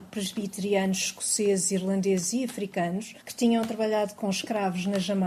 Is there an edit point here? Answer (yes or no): yes